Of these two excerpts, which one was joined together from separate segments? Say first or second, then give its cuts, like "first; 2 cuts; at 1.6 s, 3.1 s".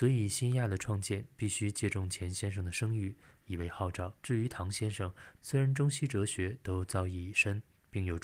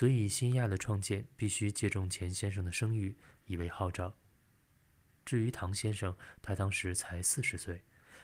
first; 2 cuts; at 4.2 s, 5.4 s